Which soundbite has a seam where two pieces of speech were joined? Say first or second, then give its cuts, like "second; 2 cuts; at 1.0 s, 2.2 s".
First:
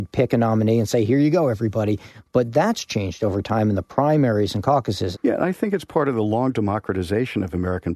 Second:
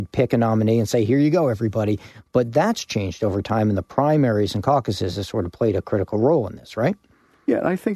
first; 1 cut; at 5.1 s